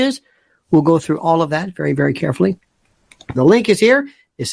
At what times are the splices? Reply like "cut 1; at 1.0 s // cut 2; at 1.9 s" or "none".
cut 1; at 3.3 s